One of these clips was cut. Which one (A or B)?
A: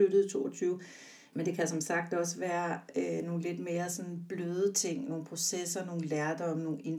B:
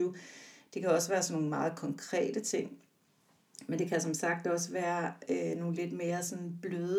A